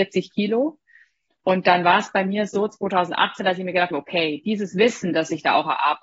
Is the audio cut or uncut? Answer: uncut